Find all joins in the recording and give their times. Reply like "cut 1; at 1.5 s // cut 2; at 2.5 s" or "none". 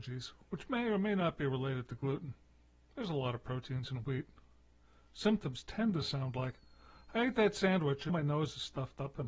cut 1; at 8.1 s